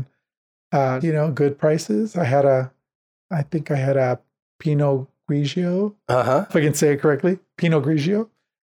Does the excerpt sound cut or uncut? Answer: cut